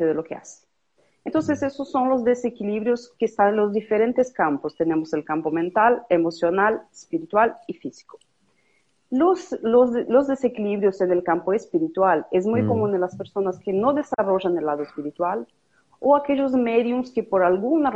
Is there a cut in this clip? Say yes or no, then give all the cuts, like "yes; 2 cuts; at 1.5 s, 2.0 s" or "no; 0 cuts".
no; 0 cuts